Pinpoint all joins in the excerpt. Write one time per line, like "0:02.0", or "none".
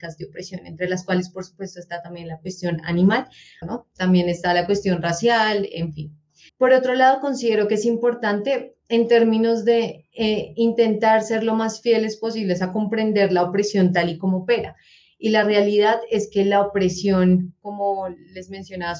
0:03.6
0:06.5